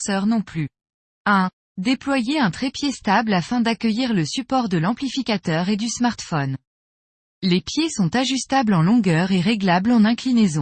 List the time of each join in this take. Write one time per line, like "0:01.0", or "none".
0:01.1
0:07.3